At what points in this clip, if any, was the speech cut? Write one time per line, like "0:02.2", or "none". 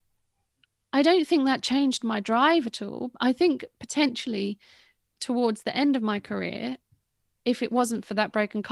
none